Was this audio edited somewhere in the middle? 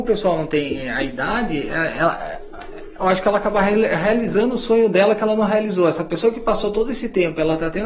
no; 0 cuts

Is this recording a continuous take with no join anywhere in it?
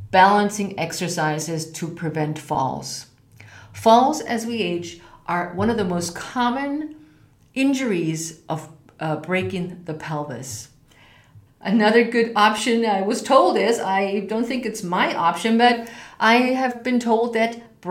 no; 1 cut; at 11.5 s

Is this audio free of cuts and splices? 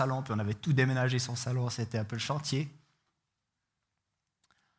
yes; 0 cuts

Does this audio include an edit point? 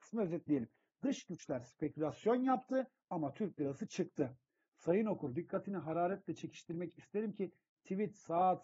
yes; 1 cut; at 4.7 s

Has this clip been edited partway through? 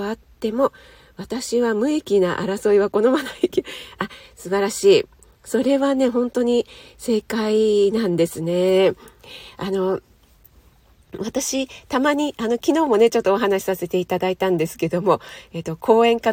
no; 0 cuts

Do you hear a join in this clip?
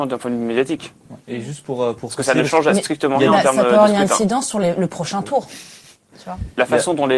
no; 0 cuts

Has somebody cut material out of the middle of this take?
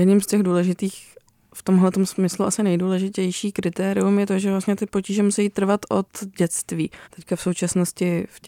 yes; 1 cut; at 7.0 s

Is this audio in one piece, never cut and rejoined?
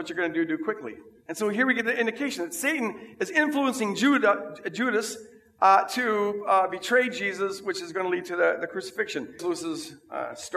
no; 1 cut; at 9.4 s

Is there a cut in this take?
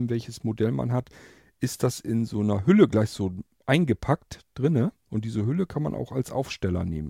no; 0 cuts

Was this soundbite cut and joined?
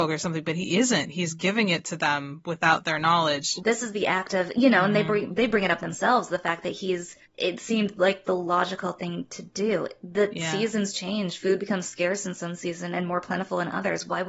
yes; 1 cut; at 3.6 s

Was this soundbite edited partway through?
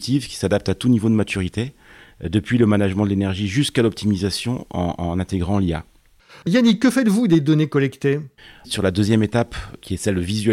yes; 1 cut; at 6.4 s

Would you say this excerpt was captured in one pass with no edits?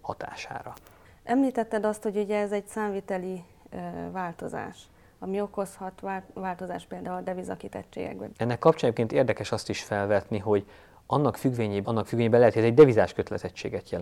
no; 3 cuts; at 1.0 s, 8.3 s, 11.8 s

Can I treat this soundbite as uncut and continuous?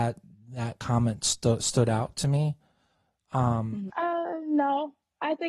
no; 1 cut; at 3.9 s

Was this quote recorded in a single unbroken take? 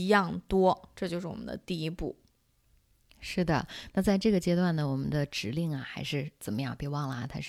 yes; 0 cuts

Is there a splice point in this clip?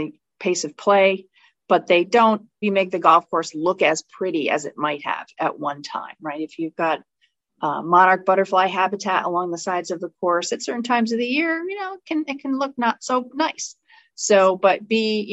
yes; 1 cut; at 2.6 s

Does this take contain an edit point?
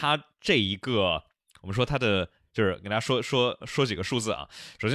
yes; 1 cut; at 2.5 s

